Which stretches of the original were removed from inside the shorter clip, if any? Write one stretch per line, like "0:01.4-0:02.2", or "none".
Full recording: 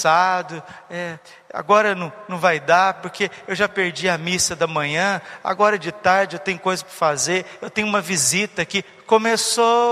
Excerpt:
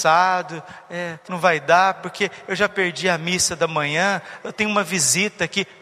0:01.3-0:02.3
0:05.4-0:07.6